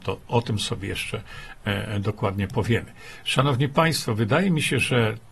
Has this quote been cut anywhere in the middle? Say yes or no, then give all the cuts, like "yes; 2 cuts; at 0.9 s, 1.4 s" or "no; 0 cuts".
no; 0 cuts